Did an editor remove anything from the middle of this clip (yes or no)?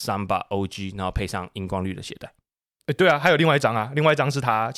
no